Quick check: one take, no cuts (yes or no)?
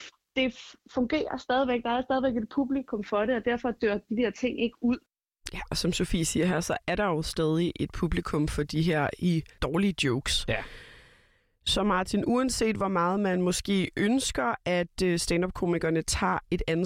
yes